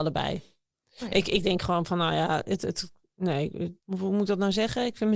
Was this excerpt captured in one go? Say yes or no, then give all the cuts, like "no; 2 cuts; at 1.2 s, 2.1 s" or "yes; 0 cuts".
no; 1 cut; at 3.8 s